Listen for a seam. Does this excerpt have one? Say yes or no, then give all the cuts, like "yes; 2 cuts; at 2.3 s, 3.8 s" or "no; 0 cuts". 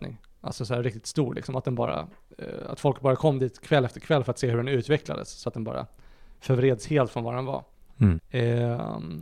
yes; 1 cut; at 8.2 s